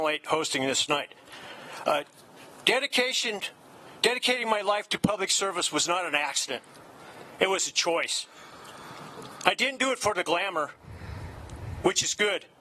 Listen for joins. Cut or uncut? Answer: uncut